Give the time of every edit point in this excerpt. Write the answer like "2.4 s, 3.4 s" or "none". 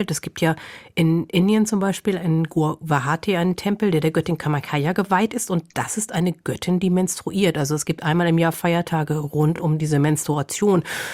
none